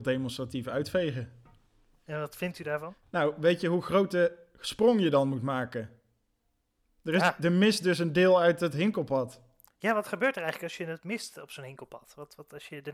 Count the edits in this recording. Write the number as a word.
zero